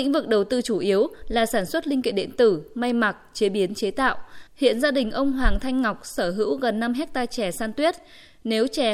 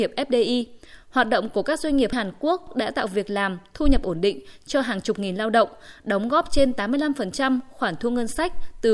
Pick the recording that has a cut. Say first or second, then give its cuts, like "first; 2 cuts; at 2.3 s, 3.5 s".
first; 1 cut; at 4.5 s